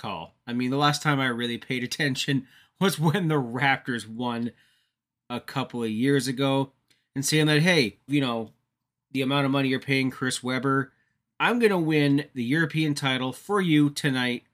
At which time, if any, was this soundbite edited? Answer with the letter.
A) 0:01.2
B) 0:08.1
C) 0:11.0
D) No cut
B